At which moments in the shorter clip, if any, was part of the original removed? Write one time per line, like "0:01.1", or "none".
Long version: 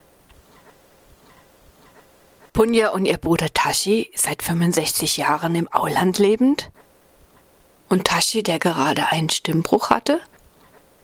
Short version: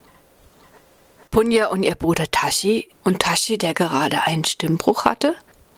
0:02.9